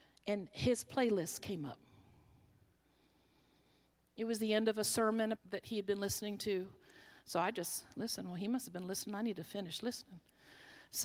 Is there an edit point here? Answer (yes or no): yes